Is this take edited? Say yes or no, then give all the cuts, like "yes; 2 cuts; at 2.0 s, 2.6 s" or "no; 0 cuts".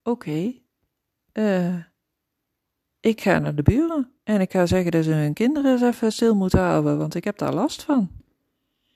no; 0 cuts